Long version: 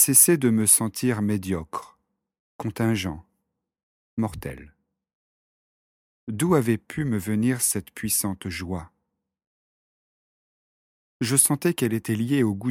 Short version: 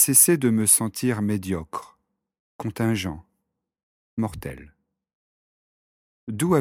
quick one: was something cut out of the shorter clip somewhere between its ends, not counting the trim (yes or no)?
no